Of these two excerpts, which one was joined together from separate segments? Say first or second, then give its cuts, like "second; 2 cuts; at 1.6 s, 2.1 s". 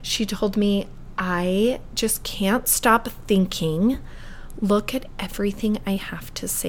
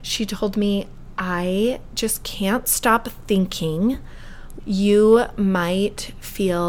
second; 1 cut; at 4.6 s